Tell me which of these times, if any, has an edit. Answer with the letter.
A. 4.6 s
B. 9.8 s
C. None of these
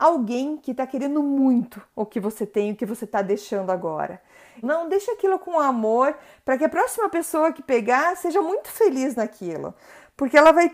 A